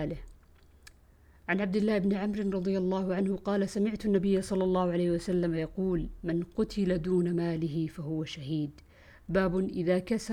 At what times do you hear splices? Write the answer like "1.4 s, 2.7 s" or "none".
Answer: none